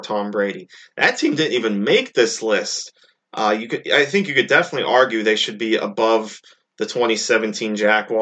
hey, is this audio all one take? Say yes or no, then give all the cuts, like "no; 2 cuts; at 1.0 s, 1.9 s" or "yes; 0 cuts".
yes; 0 cuts